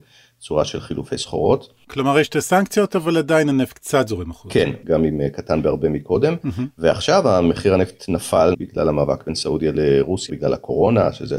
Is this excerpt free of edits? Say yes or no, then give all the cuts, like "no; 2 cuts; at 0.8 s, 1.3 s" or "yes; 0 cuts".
no; 3 cuts; at 4.8 s, 8.5 s, 10.3 s